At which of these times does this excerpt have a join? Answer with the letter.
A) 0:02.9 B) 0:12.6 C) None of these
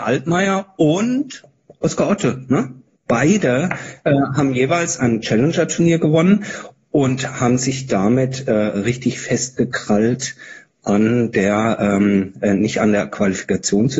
A